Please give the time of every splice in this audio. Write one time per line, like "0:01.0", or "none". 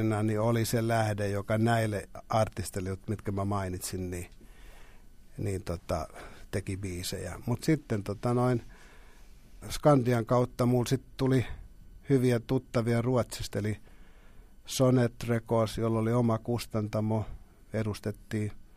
0:07.6
0:09.6